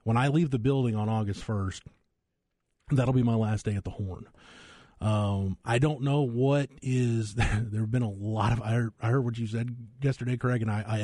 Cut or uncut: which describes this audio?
uncut